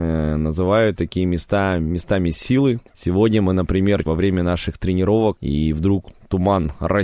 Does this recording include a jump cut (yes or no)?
yes